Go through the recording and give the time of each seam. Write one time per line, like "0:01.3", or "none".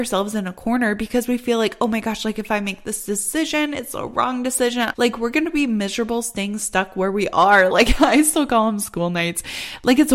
0:04.9
0:07.7

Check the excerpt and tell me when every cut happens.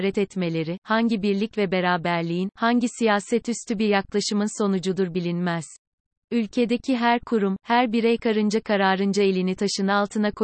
0:06.2

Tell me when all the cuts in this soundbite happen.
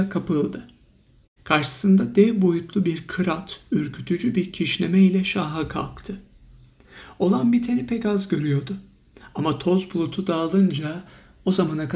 0:01.4

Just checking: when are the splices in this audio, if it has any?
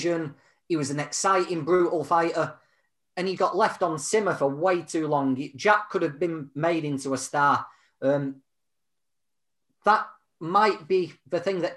0:03.4

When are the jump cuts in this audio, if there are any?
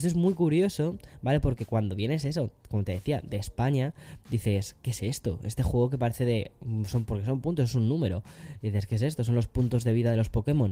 none

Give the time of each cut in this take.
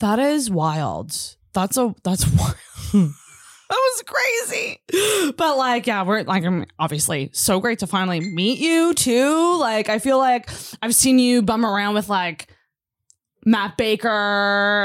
none

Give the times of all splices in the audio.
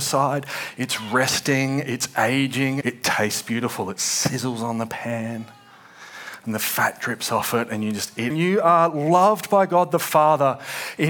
0:02.8
0:08.3

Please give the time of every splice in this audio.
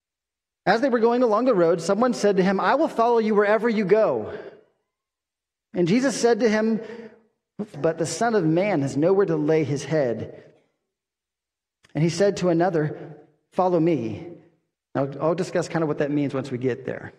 0:07.7
0:14.7

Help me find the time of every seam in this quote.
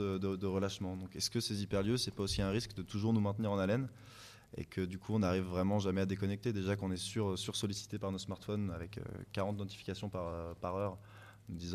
none

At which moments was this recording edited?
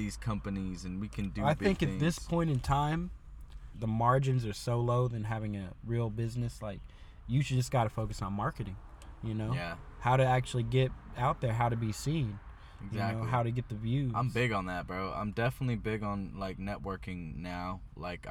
0:03.7

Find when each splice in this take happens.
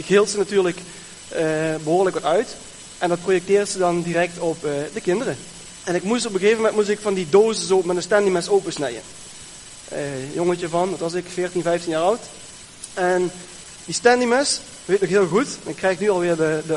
0:05.8

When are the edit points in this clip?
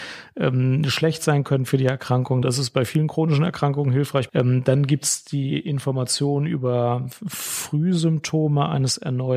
0:02.4
0:04.3

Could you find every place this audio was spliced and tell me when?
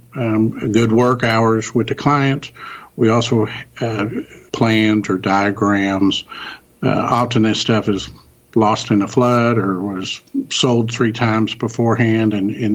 0:04.5

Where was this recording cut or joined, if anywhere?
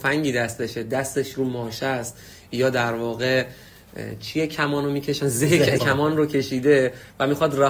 0:05.8

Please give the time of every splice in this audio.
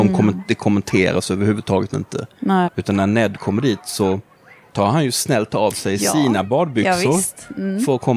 0:02.6

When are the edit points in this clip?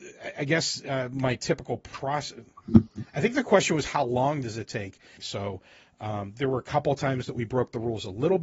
0:05.2

